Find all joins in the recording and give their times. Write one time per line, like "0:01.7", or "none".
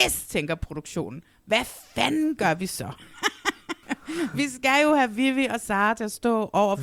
0:03.8